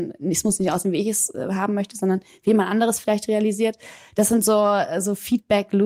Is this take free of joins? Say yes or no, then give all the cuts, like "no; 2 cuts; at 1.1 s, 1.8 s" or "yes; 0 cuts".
yes; 0 cuts